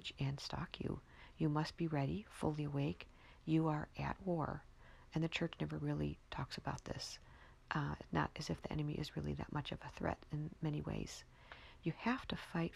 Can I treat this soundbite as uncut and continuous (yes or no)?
yes